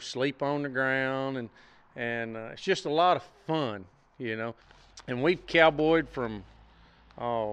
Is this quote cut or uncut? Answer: uncut